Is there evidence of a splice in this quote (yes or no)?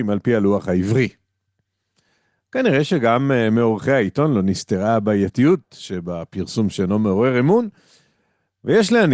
no